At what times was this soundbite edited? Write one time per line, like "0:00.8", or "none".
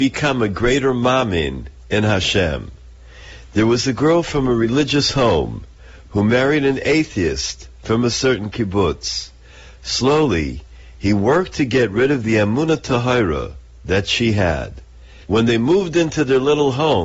0:15.2